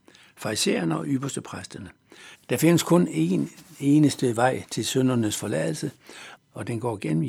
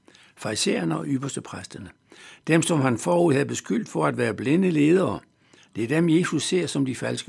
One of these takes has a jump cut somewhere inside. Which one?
first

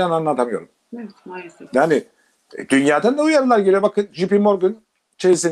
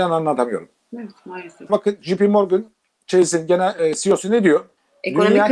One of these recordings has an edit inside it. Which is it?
second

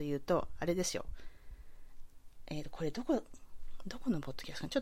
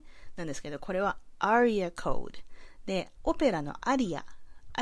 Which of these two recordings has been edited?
second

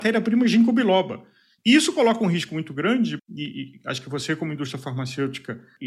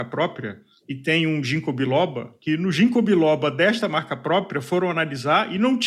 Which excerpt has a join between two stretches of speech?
first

